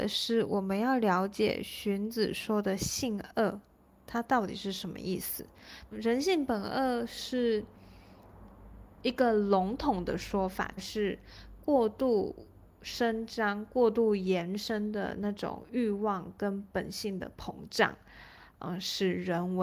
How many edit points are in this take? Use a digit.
2